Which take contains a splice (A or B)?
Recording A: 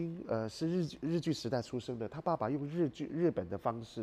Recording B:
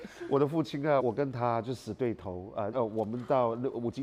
B